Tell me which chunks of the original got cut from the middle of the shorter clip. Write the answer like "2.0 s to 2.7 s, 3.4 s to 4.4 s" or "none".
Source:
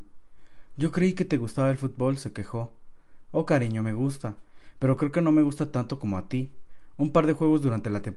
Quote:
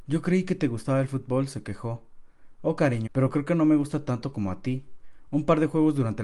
3.8 s to 4.7 s